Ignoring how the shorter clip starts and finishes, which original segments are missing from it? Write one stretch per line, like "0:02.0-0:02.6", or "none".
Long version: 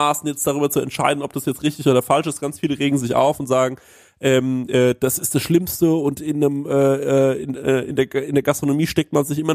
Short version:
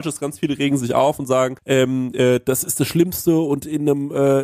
0:03.8-0:04.1

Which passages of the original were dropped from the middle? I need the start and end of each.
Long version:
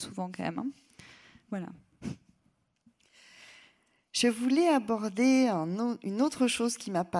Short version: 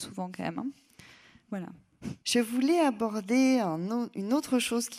0:02.2-0:04.1

